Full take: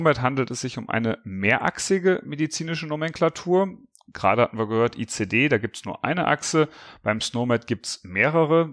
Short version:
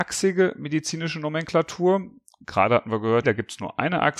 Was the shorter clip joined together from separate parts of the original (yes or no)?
yes